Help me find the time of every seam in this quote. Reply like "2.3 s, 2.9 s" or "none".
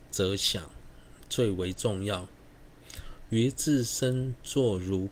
none